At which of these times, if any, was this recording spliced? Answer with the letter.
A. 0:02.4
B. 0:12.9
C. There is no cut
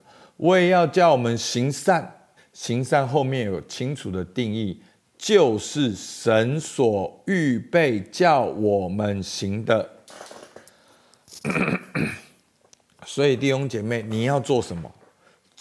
A